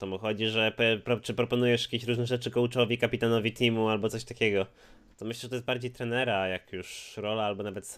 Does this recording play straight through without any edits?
no; 1 cut; at 5.1 s

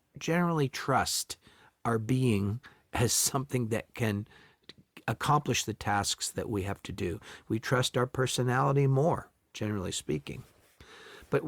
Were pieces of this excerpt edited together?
no; 0 cuts

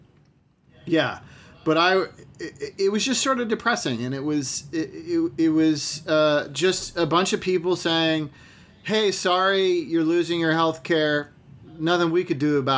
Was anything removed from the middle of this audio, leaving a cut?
no; 0 cuts

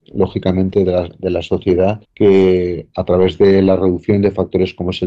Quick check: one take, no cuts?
no; 1 cut; at 2.0 s

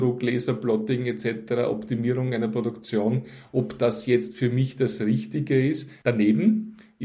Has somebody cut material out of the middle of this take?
yes; 1 cut; at 6.0 s

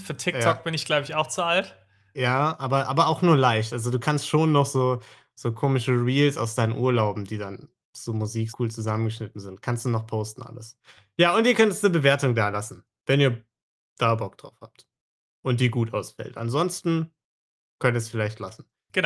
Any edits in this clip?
yes; 2 cuts; at 8.5 s, 10.8 s

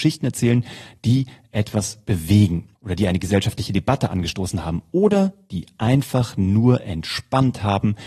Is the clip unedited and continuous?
no; 1 cut; at 2.8 s

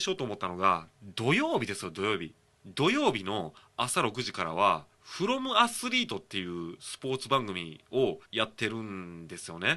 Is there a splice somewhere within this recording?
yes; 3 cuts; at 2.6 s, 4.9 s, 8.3 s

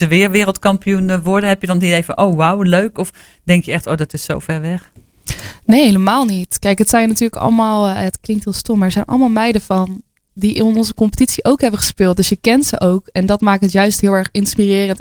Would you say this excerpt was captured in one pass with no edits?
yes; 0 cuts

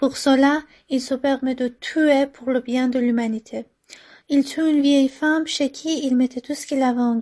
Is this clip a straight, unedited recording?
no; 1 cut; at 4.2 s

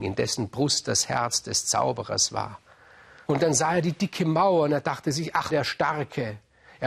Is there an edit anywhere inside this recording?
yes; 2 cuts; at 3.3 s, 5.5 s

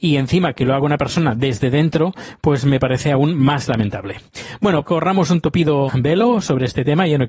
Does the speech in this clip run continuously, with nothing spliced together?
no; 2 cuts; at 4.8 s, 5.9 s

